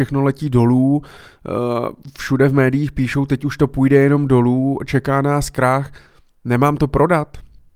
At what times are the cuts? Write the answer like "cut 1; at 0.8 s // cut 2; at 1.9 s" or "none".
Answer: none